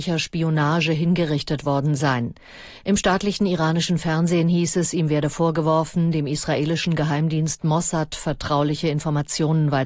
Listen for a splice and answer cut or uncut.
uncut